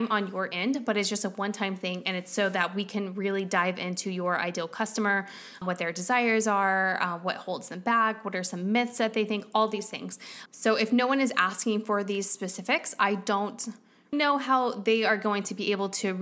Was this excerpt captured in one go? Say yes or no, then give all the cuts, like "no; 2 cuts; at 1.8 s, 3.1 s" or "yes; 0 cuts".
no; 2 cuts; at 10.5 s, 14.1 s